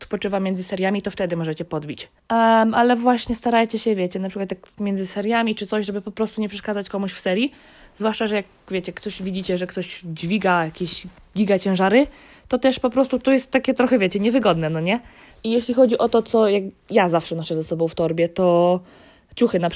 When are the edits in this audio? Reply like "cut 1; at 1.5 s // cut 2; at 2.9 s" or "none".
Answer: cut 1; at 2.2 s // cut 2; at 15.3 s